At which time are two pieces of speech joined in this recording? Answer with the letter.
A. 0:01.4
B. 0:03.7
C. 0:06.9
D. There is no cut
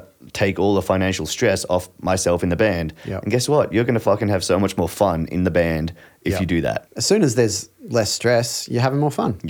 C